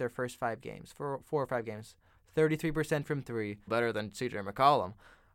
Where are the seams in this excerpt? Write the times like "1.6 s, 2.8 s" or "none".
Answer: 2.2 s, 3.7 s

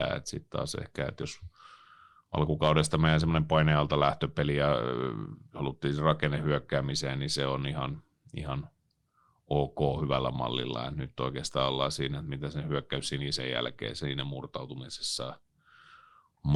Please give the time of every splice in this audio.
none

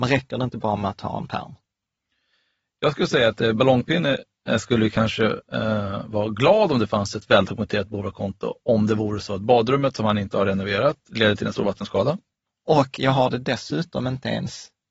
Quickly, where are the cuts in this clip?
11.1 s, 12.5 s

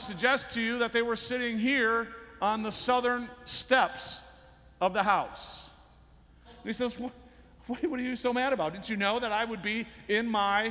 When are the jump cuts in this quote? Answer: 6.4 s

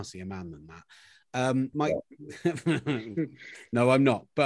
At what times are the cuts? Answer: 1.7 s

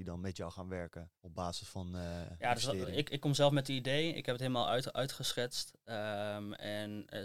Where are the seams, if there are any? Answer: 1.2 s

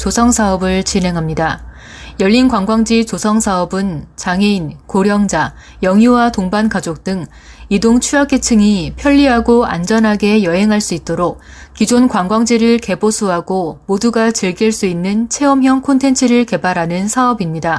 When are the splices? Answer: none

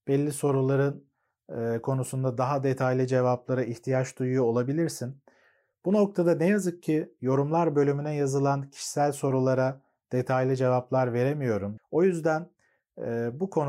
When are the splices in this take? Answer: 11.8 s

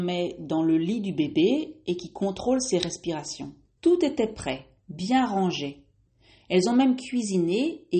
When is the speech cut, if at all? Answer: 3.8 s

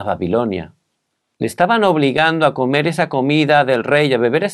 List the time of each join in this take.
1.3 s

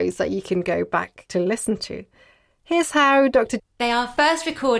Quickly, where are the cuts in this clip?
3.6 s

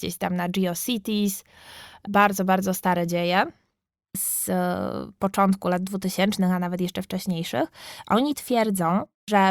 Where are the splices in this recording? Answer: none

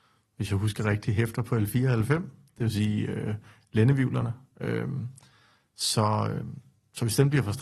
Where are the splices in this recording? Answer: none

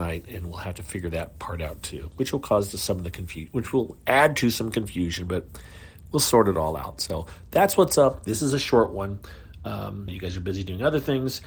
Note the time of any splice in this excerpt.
10.1 s

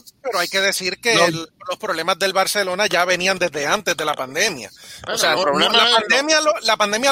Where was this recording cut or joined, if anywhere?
5.4 s

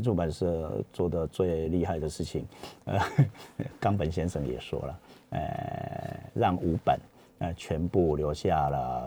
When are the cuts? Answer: none

